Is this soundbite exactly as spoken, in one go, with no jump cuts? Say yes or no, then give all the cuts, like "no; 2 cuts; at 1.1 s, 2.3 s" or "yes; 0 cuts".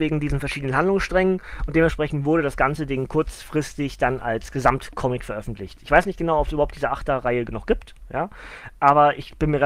yes; 0 cuts